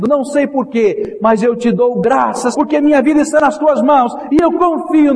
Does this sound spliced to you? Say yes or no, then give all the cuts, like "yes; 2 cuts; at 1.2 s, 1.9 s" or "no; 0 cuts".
yes; 1 cut; at 2.5 s